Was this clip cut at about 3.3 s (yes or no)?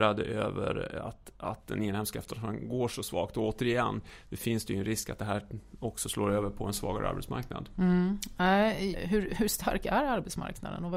no